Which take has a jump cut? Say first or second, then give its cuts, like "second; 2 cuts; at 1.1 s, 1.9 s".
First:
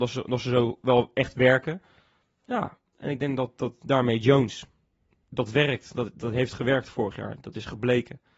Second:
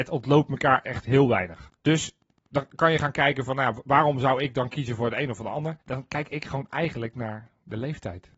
second; 2 cuts; at 1.8 s, 5.8 s